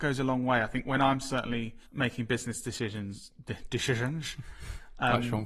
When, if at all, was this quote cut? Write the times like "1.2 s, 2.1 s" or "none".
1.8 s